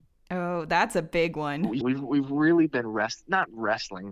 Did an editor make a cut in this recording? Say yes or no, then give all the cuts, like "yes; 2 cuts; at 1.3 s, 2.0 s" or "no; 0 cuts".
yes; 1 cut; at 1.8 s